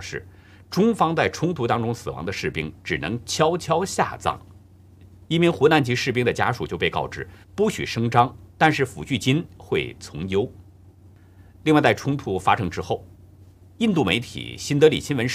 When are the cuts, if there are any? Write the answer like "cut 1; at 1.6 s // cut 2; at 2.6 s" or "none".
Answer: cut 1; at 7.4 s